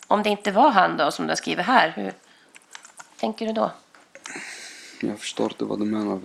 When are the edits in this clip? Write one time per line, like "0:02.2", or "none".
none

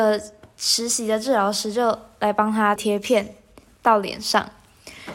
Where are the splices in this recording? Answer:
0:02.8

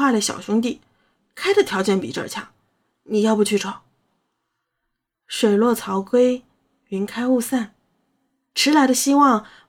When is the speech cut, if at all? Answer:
0:03.6

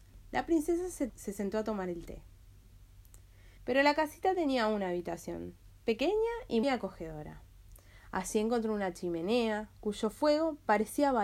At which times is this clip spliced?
0:01.1
0:03.6
0:06.6

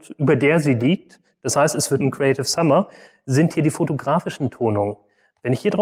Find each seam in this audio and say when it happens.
0:02.0

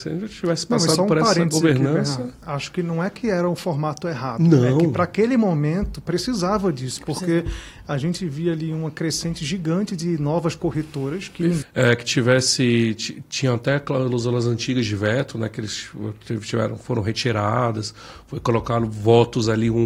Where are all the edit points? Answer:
0:11.6

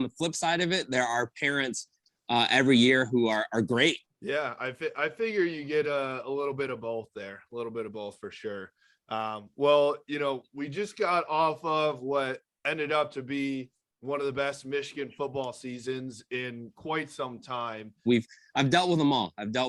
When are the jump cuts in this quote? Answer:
0:04.0
0:18.1

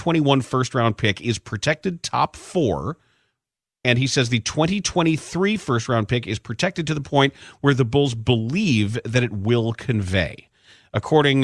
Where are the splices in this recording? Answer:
none

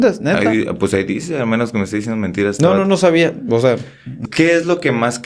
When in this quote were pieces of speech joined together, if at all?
0:04.3

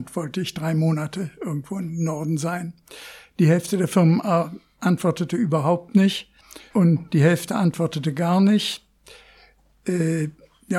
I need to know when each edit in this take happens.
0:06.7

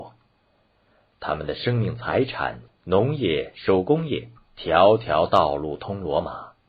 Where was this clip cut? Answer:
0:02.7
0:04.4

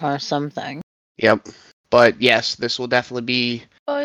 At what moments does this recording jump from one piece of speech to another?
none

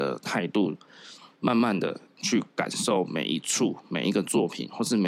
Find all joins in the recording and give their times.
none

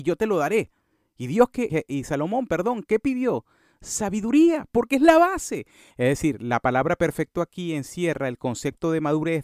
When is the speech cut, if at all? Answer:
0:01.7
0:05.9

